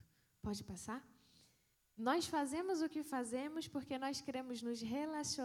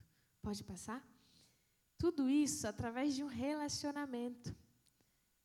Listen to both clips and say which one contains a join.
first; 1 cut; at 1.7 s

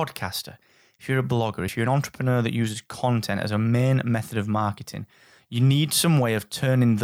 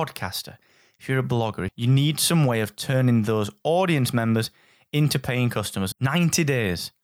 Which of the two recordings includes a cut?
second; 2 cuts; at 1.7 s, 5.9 s

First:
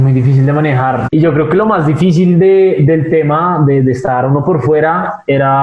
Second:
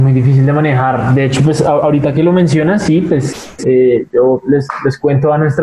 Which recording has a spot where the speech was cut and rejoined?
first; 1 cut; at 1.0 s

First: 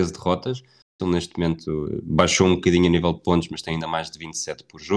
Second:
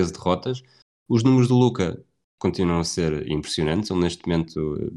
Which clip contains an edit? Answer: first; 1 cut; at 1.0 s

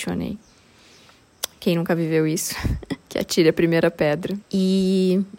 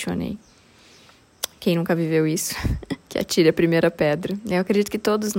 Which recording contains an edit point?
first; 1 cut; at 4.4 s

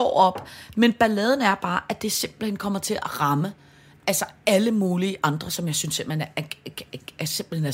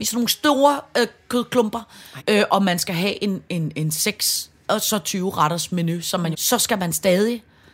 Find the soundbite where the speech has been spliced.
second; 2 cuts; at 2.2 s, 6.3 s

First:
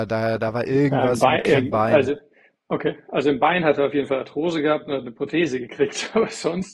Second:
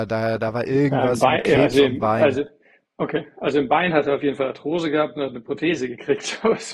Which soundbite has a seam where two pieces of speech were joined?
first; 1 cut; at 1.6 s

